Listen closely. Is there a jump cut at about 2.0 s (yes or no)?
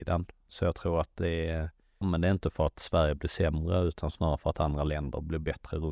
yes